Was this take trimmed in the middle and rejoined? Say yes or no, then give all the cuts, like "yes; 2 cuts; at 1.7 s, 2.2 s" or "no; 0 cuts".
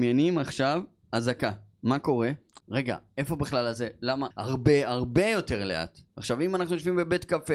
yes; 3 cuts; at 2.6 s, 4.3 s, 6.1 s